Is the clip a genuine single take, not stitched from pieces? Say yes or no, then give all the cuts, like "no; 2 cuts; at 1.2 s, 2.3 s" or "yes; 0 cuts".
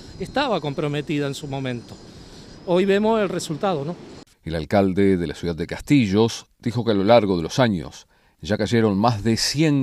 no; 2 cuts; at 4.3 s, 6.5 s